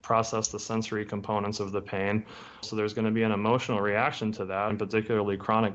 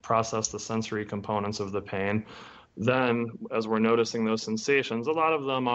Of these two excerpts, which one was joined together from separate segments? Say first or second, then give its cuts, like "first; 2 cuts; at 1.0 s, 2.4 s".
first; 2 cuts; at 2.6 s, 4.7 s